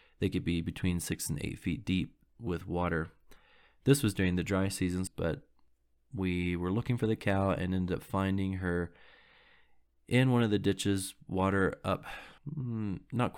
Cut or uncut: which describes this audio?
cut